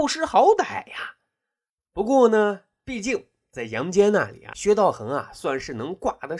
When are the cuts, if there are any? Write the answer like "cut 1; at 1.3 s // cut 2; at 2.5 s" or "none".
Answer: none